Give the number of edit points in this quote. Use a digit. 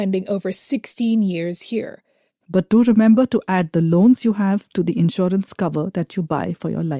1